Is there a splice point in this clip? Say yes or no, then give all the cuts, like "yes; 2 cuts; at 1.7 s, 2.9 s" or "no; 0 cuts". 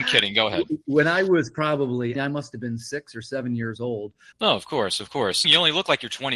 yes; 3 cuts; at 2.2 s, 4.3 s, 5.4 s